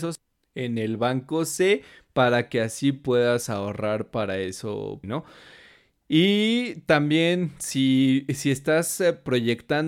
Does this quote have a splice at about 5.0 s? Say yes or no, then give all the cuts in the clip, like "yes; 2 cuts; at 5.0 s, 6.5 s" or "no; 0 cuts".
yes; 1 cut; at 5.0 s